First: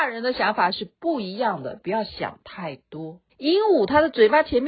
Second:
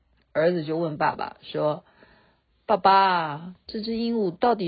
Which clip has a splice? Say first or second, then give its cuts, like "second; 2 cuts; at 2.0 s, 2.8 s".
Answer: first; 1 cut; at 3.3 s